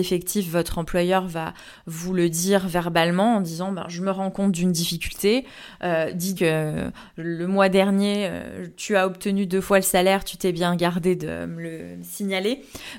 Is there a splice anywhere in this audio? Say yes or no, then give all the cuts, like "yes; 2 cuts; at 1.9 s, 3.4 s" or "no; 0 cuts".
yes; 1 cut; at 6.4 s